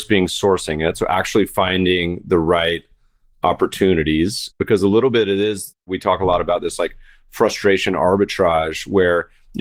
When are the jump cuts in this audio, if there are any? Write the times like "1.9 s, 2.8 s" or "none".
none